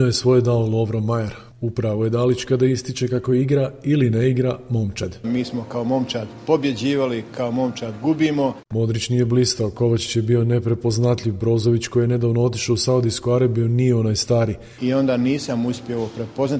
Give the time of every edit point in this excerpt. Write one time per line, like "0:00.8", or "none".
0:05.2
0:08.6
0:14.8

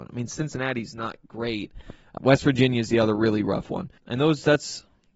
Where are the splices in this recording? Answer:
0:02.2
0:04.0

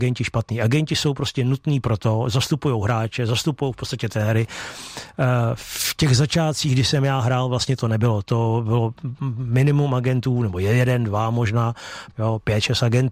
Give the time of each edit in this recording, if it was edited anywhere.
0:12.1

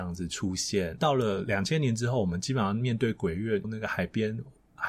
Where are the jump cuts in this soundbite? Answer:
0:01.0
0:03.6

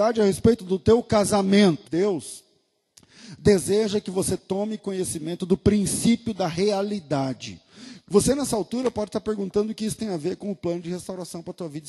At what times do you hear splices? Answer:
0:01.8
0:08.1

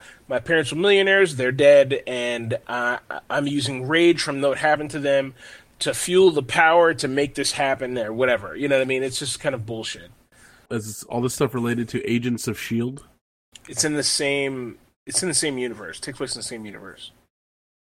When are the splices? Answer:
0:10.7

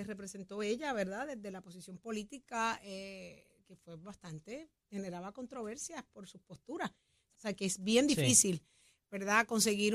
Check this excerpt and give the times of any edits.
0:07.3

